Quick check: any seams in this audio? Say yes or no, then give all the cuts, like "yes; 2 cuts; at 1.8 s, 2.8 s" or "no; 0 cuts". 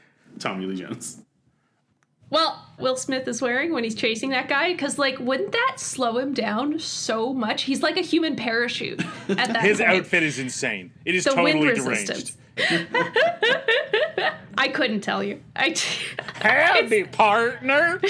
yes; 2 cuts; at 2.8 s, 12.6 s